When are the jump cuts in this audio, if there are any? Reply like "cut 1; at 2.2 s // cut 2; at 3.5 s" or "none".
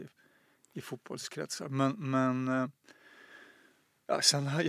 none